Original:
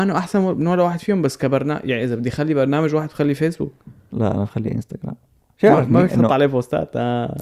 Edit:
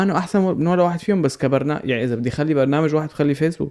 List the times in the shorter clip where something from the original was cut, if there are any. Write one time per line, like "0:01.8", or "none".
none

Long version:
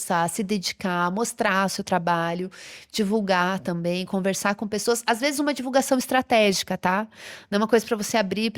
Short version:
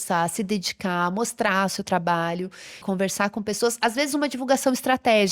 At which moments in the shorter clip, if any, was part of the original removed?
0:02.8

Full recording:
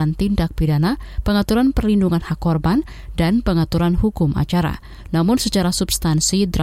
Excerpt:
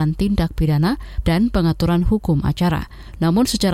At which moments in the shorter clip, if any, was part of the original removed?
0:01.2

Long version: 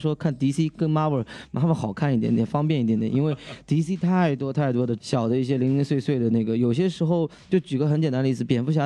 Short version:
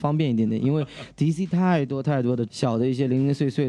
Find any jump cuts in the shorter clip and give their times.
none

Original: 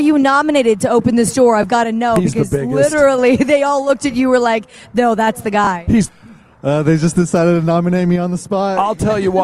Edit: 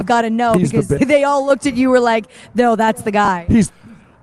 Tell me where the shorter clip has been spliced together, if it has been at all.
0:01.0

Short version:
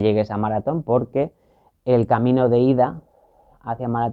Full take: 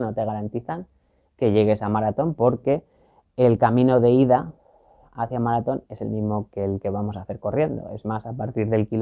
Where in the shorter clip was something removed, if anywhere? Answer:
none

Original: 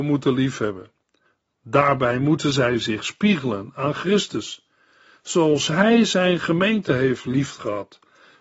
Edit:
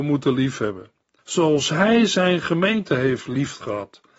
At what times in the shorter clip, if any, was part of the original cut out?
0:01.2

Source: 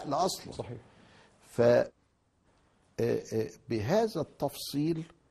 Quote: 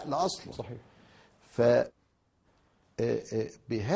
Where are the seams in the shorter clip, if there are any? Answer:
none

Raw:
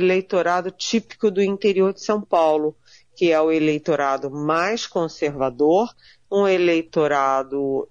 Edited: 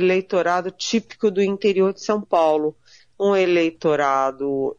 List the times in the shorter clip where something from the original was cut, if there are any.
0:03.0

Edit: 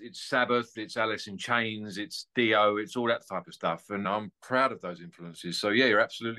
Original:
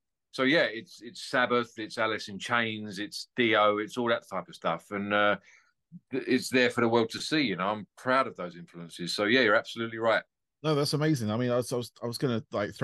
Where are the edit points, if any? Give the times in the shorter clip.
0:04.0

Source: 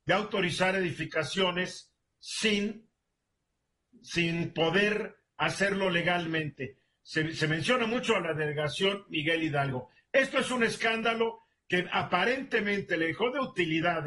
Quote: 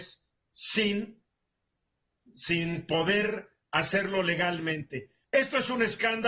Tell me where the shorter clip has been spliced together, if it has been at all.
0:05.2

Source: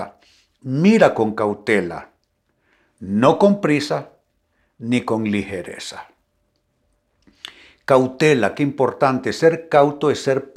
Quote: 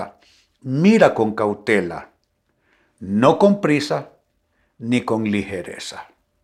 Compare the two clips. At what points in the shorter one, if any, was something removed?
none

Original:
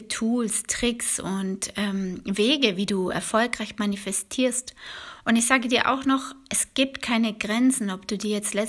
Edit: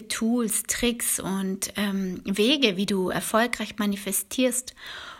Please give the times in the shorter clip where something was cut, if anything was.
none

